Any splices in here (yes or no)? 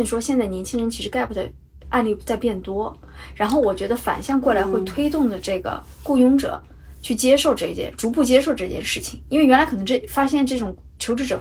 no